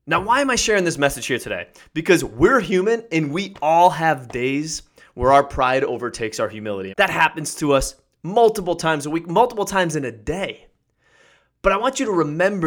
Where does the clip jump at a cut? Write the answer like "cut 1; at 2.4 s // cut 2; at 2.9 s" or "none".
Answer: cut 1; at 6.9 s